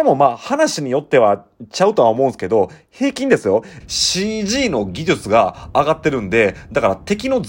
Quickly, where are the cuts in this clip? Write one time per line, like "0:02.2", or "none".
0:03.8